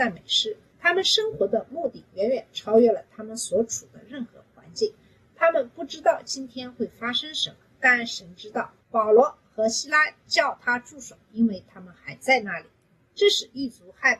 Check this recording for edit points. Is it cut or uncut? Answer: cut